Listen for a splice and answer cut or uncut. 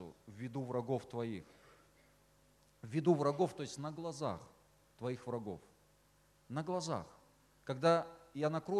uncut